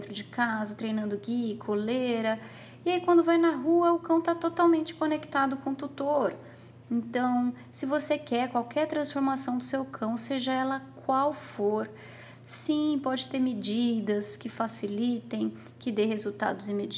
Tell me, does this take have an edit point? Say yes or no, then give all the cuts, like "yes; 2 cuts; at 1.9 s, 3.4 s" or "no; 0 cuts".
yes; 1 cut; at 6.8 s